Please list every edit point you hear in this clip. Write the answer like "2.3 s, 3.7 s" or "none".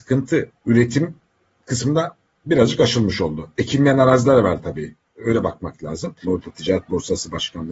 6.2 s